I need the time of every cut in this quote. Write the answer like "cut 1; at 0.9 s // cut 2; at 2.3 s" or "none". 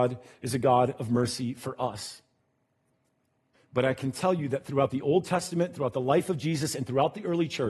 cut 1; at 3.5 s